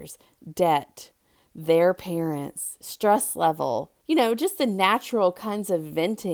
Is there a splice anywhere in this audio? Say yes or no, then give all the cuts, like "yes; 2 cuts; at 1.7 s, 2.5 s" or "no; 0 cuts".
yes; 1 cut; at 4.0 s